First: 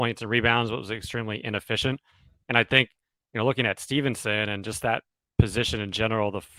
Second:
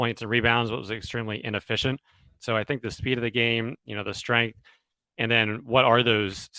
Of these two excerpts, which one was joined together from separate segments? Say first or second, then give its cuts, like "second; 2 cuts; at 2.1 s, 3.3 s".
second; 1 cut; at 2.4 s